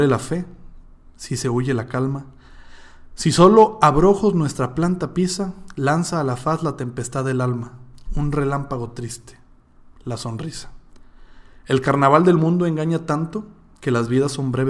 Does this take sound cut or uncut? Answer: uncut